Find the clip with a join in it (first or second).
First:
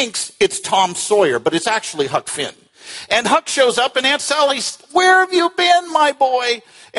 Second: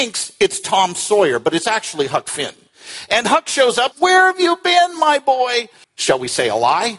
second